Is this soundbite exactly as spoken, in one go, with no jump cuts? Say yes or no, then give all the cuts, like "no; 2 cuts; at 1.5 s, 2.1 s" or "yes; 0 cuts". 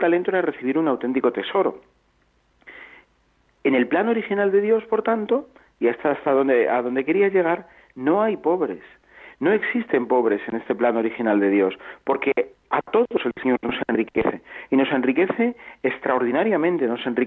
yes; 0 cuts